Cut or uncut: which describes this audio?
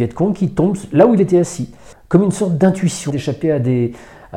cut